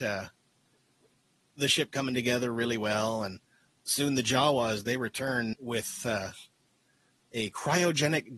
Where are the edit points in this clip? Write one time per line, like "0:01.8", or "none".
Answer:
0:05.5